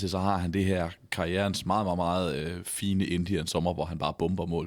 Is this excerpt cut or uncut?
uncut